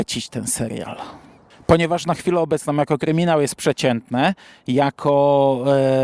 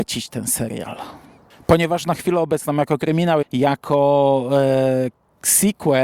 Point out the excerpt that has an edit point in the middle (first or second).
second